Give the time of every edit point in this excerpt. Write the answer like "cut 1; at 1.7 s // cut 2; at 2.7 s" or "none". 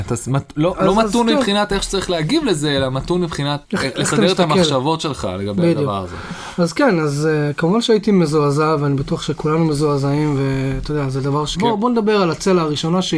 cut 1; at 3.6 s // cut 2; at 11.5 s

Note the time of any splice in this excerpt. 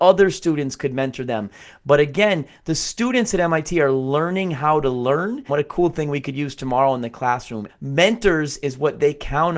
cut 1; at 5.5 s // cut 2; at 7.7 s

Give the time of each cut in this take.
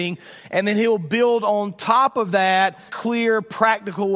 cut 1; at 2.9 s

